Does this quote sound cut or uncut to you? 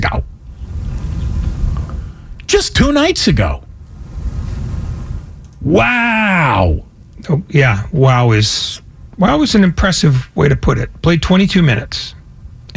uncut